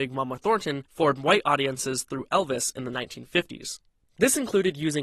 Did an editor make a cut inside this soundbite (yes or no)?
yes